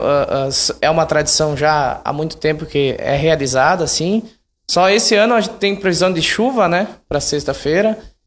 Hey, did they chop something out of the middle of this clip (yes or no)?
no